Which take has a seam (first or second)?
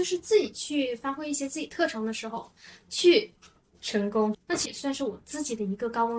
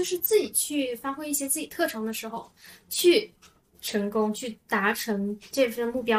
first